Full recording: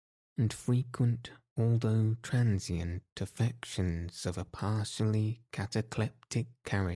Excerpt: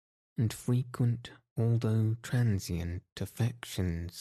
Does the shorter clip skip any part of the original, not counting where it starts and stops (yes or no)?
no